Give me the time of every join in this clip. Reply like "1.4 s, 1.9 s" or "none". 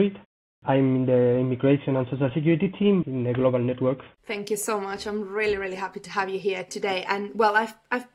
3.0 s, 4.2 s